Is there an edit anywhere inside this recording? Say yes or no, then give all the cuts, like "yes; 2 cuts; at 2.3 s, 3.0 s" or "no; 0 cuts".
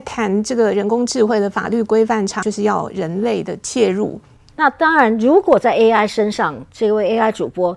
yes; 2 cuts; at 2.4 s, 4.5 s